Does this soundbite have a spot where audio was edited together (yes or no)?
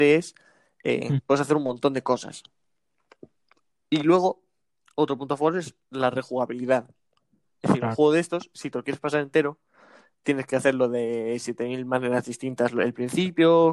no